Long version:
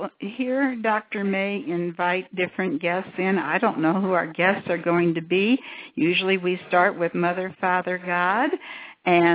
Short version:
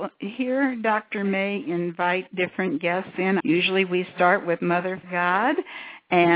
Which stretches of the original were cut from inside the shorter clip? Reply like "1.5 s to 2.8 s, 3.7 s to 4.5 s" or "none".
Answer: 3.4 s to 5.9 s, 7.6 s to 8.0 s

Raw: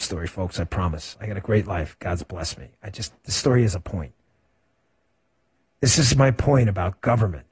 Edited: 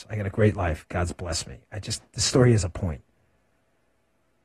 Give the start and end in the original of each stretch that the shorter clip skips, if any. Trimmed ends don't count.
none

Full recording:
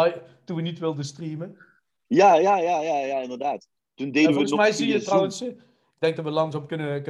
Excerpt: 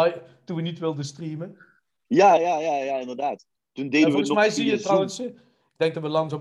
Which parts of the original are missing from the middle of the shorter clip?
2.4 s to 2.6 s

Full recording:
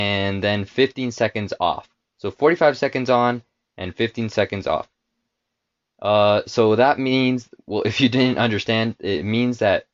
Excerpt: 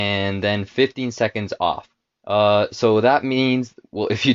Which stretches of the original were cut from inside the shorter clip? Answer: 2.1 s to 5.8 s

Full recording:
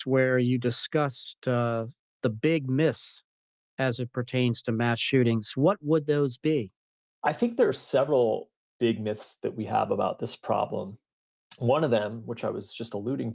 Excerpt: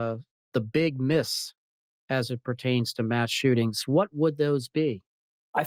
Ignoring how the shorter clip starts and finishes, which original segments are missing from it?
none

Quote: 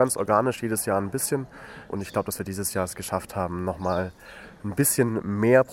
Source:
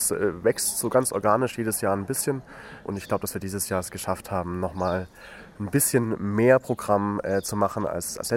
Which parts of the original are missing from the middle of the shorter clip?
none

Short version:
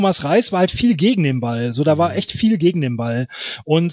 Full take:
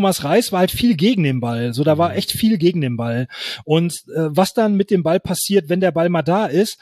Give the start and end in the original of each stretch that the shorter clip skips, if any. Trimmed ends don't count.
none

